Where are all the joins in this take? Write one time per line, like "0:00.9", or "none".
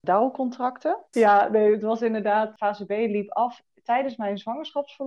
0:01.1